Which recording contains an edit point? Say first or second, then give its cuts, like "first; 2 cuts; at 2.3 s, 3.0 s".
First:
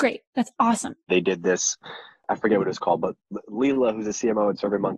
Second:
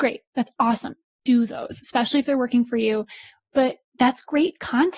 first; 1 cut; at 1.1 s